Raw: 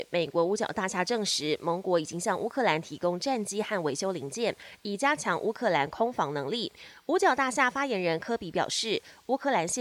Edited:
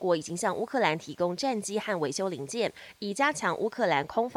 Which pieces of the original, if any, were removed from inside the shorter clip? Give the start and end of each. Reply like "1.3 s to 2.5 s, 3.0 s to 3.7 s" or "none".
none